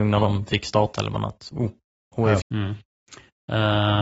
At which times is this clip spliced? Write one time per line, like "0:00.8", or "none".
0:02.4